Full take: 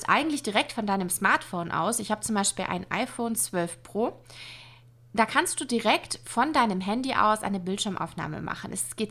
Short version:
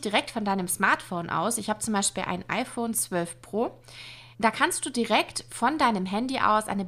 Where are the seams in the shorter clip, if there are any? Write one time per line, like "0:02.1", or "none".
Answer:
0:04.3